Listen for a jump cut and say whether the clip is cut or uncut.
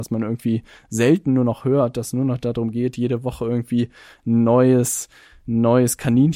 uncut